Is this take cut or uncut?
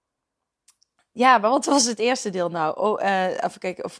uncut